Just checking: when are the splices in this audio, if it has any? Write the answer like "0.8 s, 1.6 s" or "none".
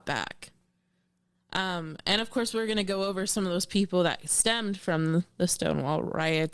1.3 s